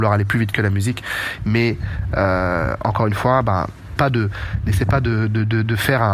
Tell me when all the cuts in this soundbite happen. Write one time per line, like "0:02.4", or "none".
0:01.4
0:04.0

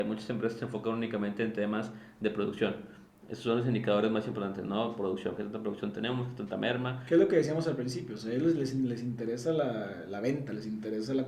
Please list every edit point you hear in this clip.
none

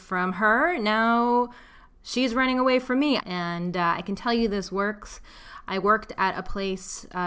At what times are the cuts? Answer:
0:03.2

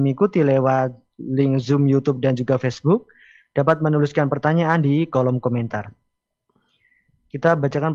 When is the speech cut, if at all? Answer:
none

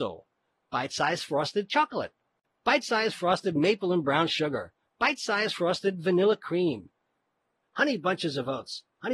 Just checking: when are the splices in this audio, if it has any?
0:04.8
0:07.6

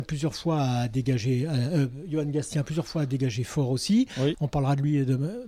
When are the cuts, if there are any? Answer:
0:04.3

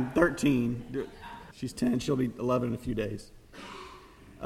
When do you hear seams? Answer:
0:01.5

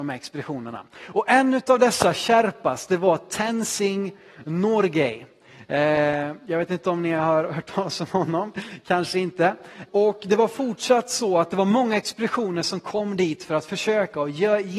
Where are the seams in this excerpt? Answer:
0:09.8

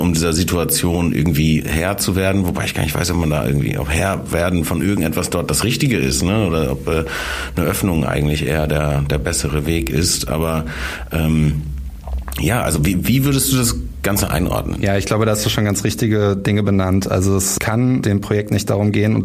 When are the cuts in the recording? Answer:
0:01.6

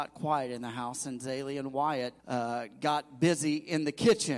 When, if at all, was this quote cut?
0:02.2

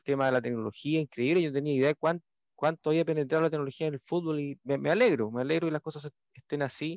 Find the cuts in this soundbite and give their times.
none

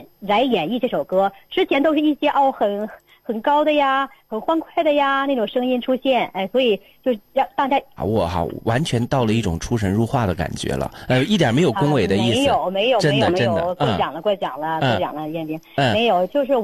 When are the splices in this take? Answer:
0:08.0

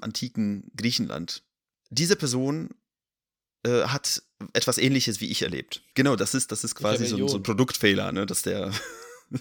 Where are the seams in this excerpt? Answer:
0:05.9

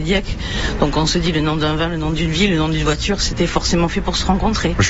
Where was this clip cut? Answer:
none

